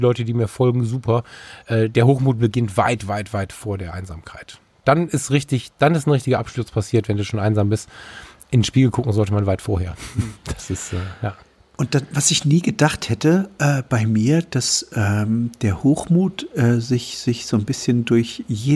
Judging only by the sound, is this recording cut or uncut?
uncut